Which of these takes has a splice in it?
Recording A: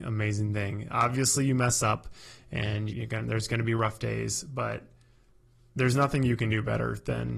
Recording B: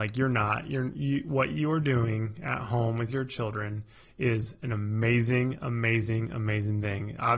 A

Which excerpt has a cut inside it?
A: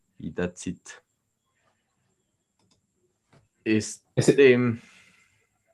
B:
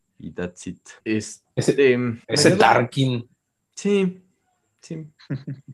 B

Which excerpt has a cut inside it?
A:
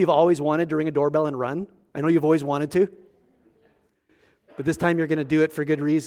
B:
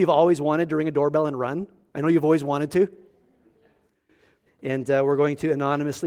B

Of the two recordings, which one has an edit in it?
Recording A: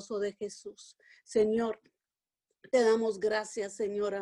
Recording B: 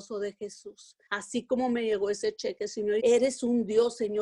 B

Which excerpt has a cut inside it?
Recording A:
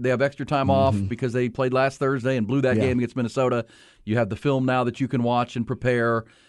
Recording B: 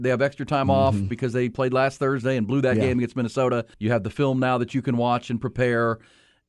B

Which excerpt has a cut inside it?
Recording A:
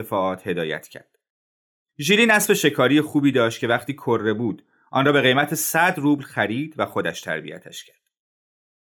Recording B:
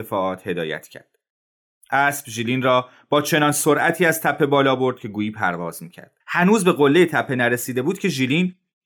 B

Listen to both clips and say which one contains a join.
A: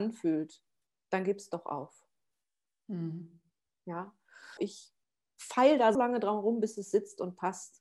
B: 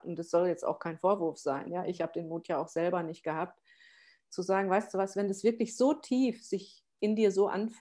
A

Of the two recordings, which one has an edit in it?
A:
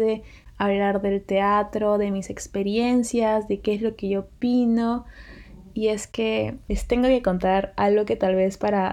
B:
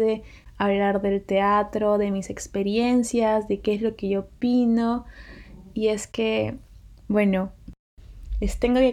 A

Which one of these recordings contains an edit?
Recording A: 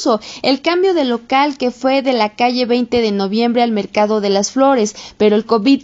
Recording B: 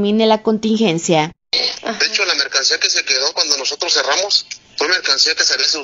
B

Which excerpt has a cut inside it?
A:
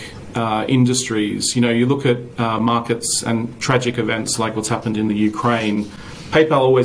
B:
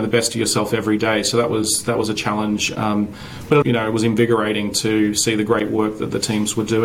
B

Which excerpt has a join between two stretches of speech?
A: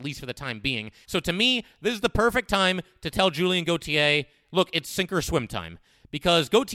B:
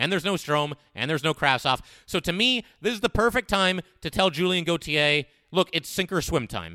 A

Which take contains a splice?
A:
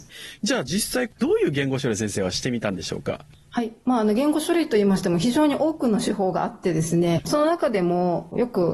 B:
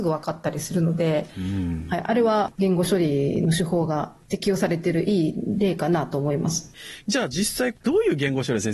A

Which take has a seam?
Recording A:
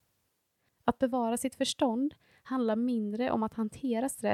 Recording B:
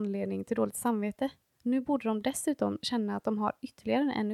B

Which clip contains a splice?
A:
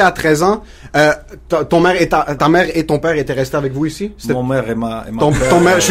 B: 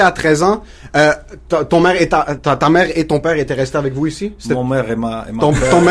A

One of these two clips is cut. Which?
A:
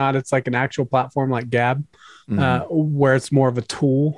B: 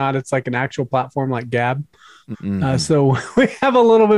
B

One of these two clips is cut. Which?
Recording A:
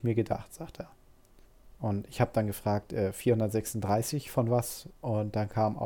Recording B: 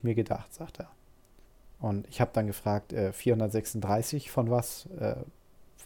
A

